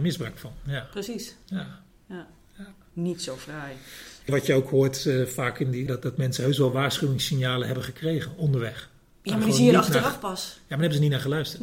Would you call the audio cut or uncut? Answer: cut